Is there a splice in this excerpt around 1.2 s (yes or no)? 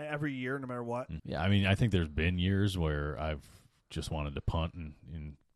yes